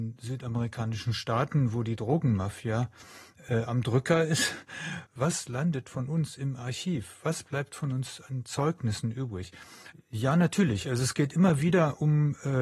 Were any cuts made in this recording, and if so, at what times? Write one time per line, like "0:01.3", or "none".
0:05.1
0:09.9